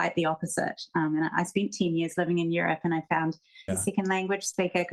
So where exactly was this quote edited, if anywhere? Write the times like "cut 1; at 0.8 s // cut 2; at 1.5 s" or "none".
cut 1; at 3.7 s